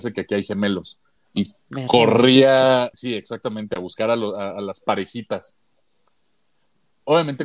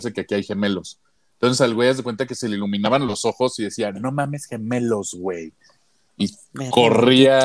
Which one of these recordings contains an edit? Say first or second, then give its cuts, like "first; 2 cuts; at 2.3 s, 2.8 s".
first; 2 cuts; at 1.2 s, 2.9 s